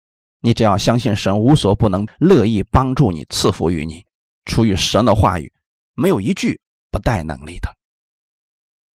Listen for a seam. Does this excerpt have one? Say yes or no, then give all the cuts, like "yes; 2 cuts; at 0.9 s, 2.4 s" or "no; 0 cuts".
yes; 1 cut; at 2.1 s